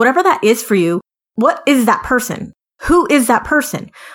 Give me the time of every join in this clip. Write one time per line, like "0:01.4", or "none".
none